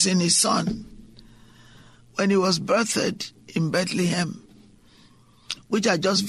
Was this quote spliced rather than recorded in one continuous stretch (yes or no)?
no